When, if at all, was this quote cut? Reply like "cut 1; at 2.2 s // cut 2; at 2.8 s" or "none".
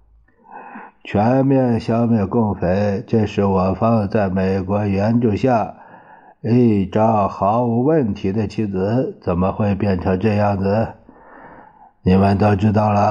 none

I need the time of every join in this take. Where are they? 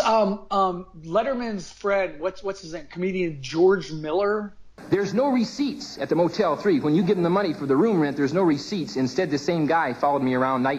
none

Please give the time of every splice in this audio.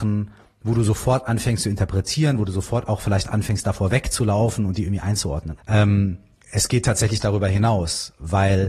cut 1; at 5.6 s

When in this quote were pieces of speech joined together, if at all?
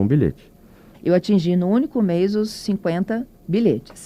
cut 1; at 0.9 s

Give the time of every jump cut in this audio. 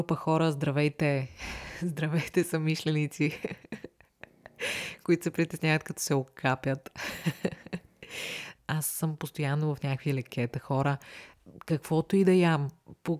cut 1; at 8.6 s

